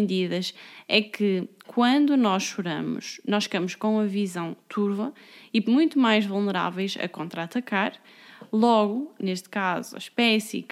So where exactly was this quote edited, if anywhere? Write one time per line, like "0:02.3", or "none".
0:05.6
0:09.2